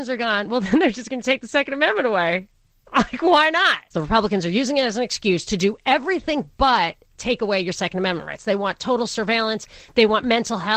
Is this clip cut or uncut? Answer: cut